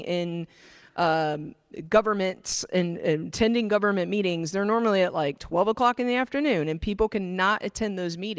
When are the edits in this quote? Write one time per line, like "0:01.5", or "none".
none